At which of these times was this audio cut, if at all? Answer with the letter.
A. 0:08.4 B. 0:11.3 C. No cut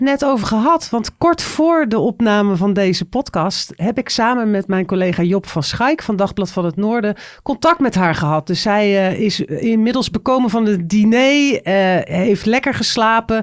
C